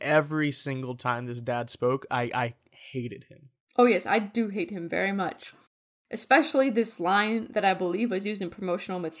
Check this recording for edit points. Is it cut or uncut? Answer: uncut